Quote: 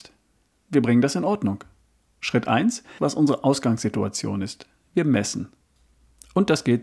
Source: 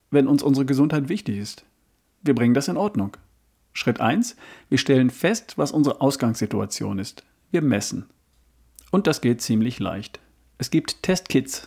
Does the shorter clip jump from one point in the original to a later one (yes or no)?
yes